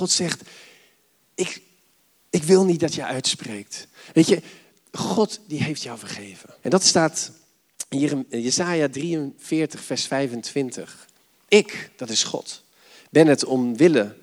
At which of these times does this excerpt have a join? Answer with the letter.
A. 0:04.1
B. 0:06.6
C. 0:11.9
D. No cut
B